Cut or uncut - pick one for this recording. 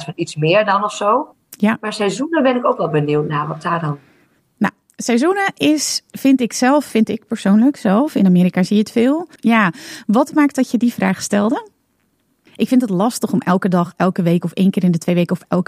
cut